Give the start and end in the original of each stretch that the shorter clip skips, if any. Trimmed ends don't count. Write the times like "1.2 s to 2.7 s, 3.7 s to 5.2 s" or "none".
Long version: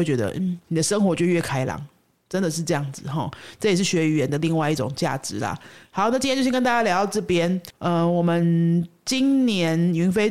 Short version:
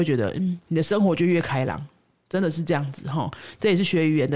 none